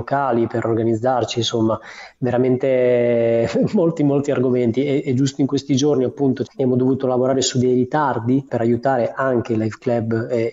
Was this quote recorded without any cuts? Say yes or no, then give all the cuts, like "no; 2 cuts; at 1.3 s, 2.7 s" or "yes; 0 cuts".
no; 2 cuts; at 6.5 s, 8.5 s